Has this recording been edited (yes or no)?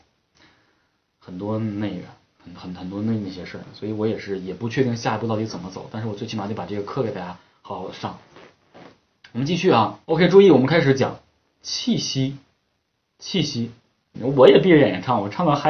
yes